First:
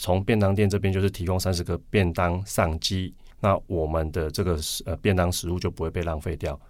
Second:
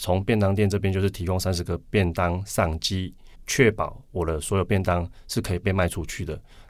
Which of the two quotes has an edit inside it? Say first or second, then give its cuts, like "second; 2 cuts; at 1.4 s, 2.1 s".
first; 1 cut; at 3.3 s